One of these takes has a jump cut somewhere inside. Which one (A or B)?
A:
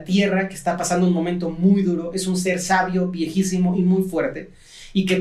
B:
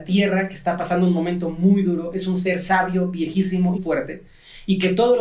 B